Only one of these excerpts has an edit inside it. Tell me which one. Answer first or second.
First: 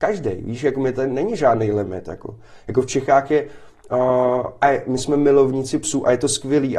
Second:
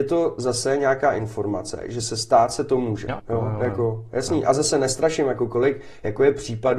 second